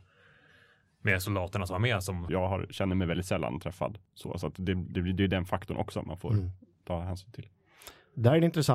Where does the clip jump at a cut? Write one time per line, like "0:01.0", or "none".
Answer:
0:02.3